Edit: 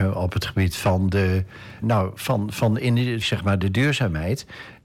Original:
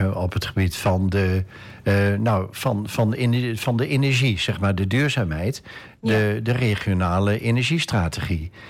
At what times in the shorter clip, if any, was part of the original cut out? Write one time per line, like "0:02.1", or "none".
0:01.8
0:03.2